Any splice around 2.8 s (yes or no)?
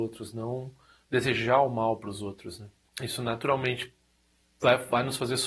no